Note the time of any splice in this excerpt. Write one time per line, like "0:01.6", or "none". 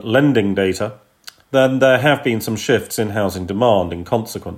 0:01.4